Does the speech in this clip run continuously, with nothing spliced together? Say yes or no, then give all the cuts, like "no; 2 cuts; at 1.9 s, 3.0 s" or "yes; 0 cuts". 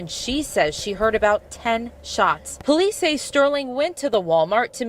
no; 1 cut; at 2.6 s